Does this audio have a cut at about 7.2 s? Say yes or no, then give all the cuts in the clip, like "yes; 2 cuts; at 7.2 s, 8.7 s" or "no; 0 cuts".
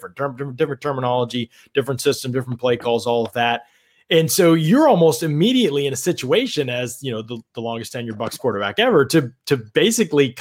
no; 0 cuts